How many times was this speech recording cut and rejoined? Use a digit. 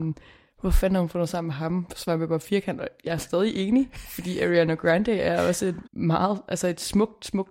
1